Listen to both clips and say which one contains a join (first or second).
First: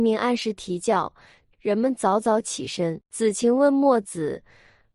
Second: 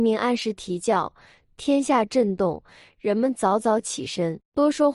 first